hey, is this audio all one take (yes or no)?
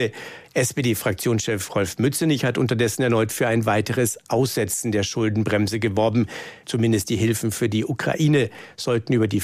no